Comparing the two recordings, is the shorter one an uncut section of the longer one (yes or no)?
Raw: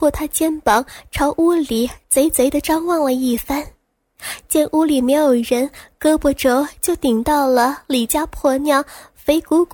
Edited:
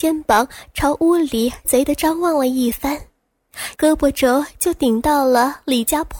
no